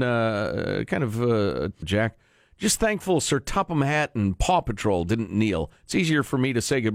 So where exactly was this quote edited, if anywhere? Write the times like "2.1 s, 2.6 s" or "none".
1.8 s

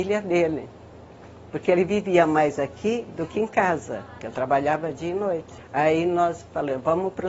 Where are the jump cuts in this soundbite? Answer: 4.2 s, 5.6 s

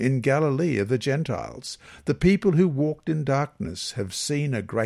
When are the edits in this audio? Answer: none

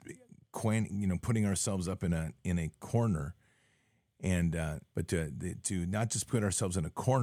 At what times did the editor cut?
4.9 s

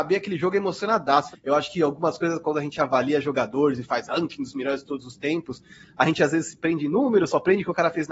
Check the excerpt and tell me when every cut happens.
1.3 s

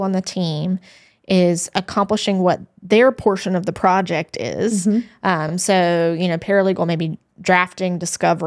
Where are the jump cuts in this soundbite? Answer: none

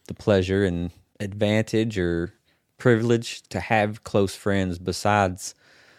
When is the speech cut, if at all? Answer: 3.4 s

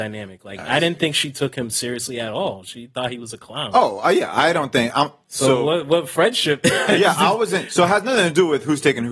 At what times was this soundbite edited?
none

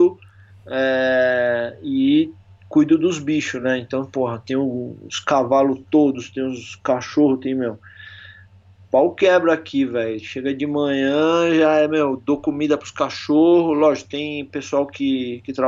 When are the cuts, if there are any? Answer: none

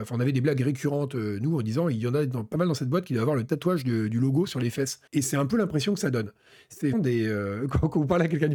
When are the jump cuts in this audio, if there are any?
5.1 s, 6.9 s

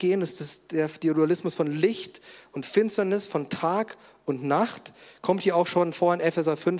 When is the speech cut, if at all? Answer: none

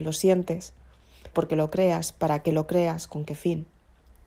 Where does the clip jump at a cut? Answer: 1.3 s

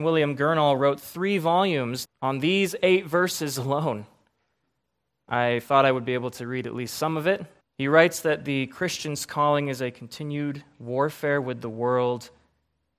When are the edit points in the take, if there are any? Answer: 2.0 s, 7.6 s

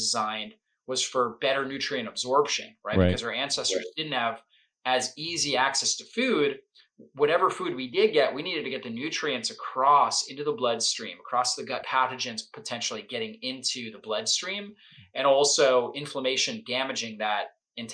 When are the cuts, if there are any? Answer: 11.8 s

